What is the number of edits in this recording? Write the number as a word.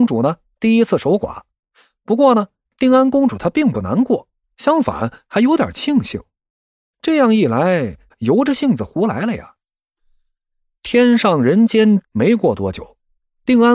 two